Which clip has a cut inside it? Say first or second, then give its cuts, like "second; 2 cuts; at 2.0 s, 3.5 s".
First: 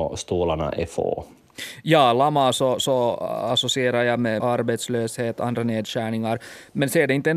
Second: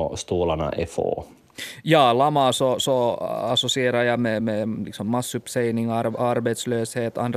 first; 1 cut; at 4.4 s